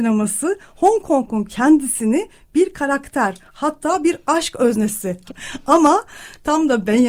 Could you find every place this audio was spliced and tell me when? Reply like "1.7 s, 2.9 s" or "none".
5.3 s